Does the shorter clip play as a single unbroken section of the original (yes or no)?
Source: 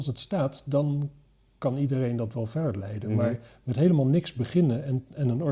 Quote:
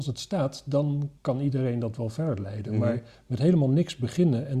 no